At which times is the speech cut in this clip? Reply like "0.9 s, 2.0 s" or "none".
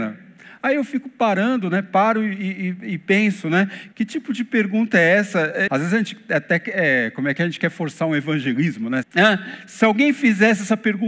3.9 s, 5.7 s, 9.0 s